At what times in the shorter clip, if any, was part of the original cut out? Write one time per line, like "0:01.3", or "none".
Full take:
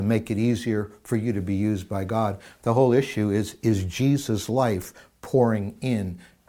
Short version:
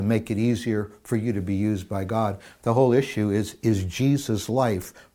none